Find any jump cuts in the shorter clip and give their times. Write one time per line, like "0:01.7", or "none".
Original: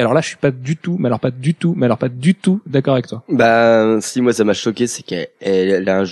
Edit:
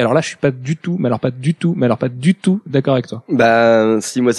none